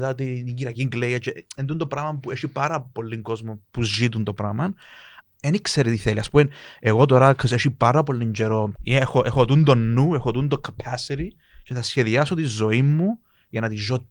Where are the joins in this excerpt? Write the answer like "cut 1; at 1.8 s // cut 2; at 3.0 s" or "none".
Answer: cut 1; at 5.2 s // cut 2; at 8.8 s

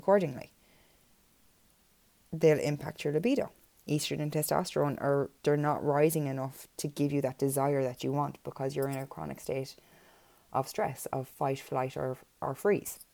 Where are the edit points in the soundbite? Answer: cut 1; at 5.4 s

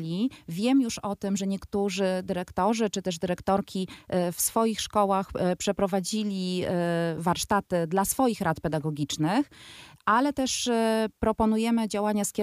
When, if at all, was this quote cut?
none

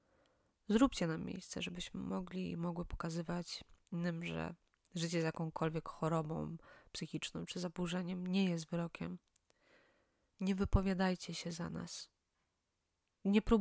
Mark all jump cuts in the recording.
none

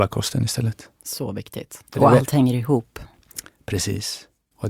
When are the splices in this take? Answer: cut 1; at 1.9 s

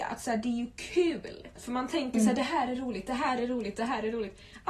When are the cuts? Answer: cut 1; at 1.6 s

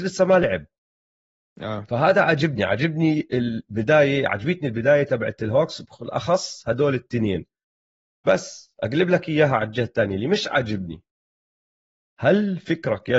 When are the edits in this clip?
none

